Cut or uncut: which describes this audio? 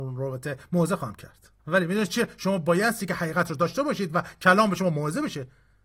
cut